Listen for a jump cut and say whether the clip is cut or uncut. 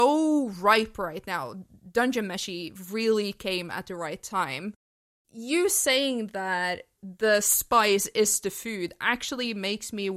uncut